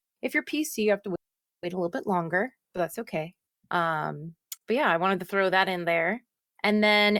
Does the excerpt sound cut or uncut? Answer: uncut